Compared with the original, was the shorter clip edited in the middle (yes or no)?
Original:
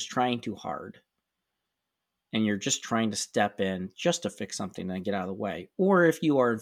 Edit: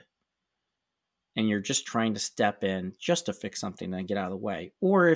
no